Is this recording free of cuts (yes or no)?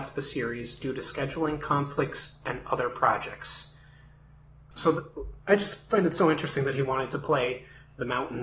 yes